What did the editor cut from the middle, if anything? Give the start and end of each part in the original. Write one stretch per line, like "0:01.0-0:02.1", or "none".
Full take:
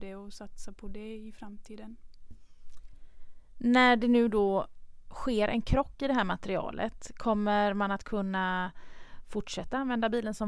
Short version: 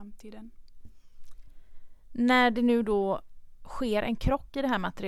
none